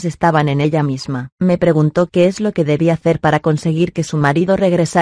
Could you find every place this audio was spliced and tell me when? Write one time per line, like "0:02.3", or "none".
0:01.3